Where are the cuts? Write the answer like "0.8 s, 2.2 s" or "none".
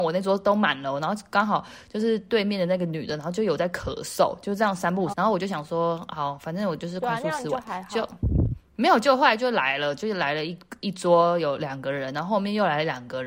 5.1 s